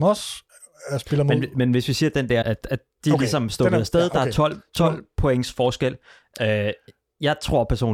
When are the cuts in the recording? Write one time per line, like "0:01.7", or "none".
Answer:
0:02.4